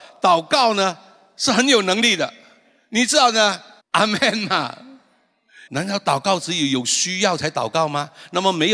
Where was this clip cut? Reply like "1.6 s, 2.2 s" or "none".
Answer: 3.8 s, 5.7 s